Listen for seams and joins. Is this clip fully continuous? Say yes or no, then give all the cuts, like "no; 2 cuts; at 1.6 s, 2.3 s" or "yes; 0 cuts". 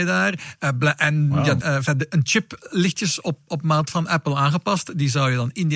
no; 1 cut; at 1.6 s